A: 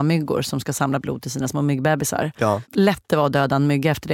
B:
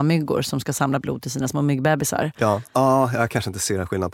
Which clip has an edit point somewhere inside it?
B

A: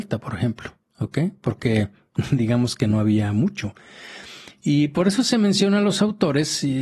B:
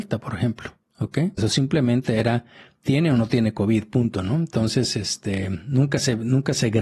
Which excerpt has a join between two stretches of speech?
B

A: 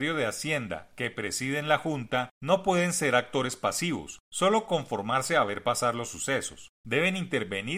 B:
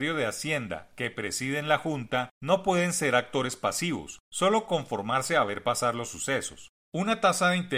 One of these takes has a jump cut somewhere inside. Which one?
B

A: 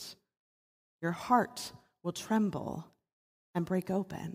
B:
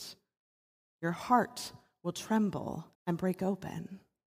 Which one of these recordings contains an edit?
B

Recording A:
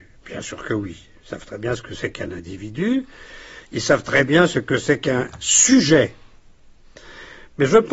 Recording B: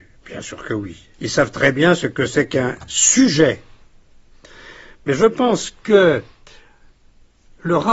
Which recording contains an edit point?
B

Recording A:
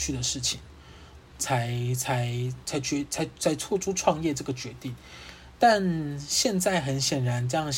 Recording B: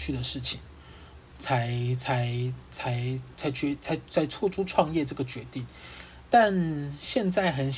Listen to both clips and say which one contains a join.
A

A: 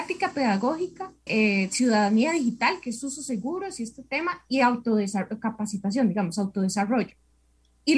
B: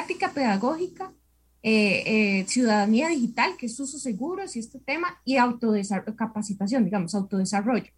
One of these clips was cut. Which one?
A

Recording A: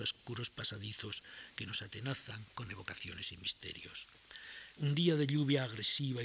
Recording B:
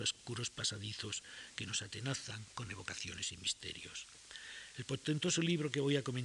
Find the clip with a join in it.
A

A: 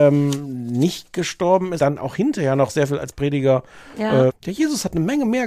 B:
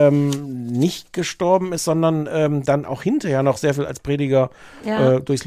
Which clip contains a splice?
A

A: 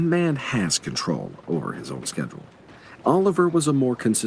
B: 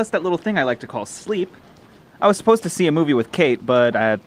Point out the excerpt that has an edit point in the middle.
A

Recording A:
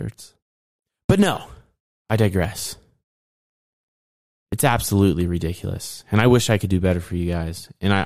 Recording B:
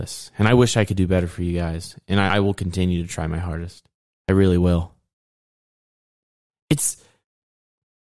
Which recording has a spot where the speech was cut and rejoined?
B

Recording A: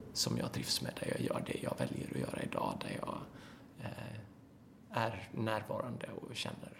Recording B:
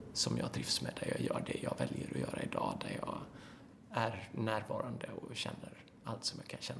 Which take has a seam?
B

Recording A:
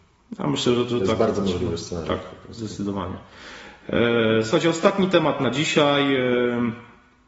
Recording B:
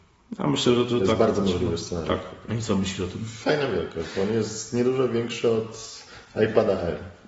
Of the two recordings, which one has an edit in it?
B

